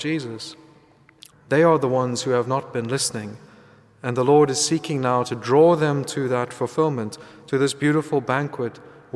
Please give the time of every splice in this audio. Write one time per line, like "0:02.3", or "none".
0:01.3

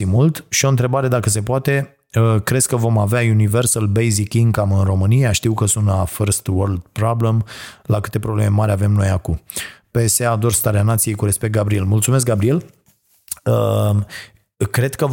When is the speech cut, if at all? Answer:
none

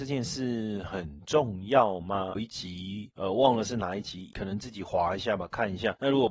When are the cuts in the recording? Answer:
0:02.4

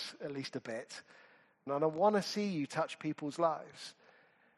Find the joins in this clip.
0:01.7

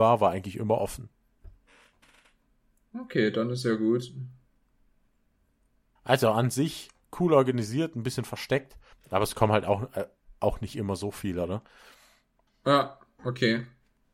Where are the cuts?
0:06.0
0:08.9
0:12.5

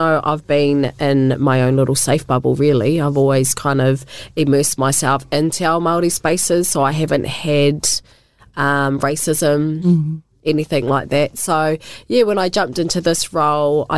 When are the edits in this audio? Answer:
none

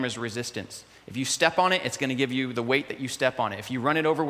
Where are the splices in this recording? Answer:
none

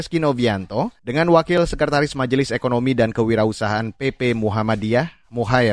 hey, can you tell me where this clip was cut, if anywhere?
0:01.0

